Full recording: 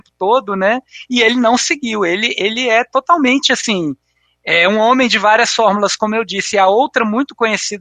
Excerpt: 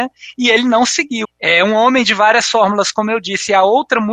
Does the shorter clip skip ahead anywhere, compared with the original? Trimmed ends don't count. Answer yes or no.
yes